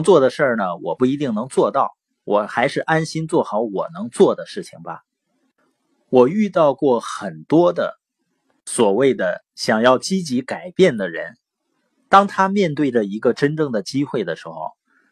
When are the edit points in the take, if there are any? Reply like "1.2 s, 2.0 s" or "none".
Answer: none

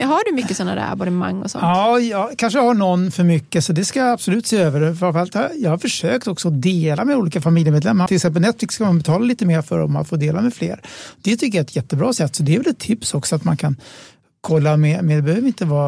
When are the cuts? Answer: 8.1 s

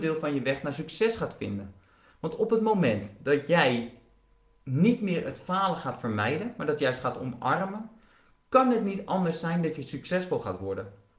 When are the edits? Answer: none

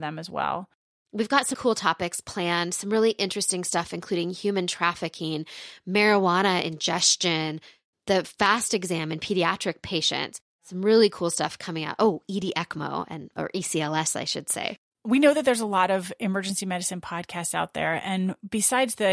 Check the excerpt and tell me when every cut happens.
1.5 s

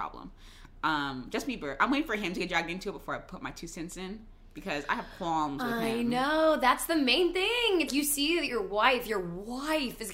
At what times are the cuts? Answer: 7.9 s

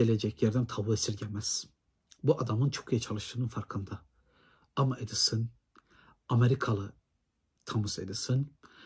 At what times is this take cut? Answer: none

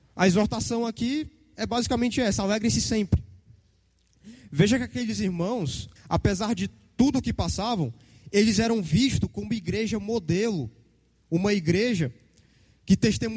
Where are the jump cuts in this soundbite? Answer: 6.0 s

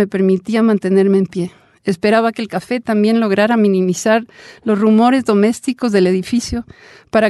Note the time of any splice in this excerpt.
none

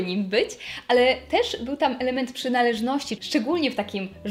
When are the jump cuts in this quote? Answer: 3.2 s

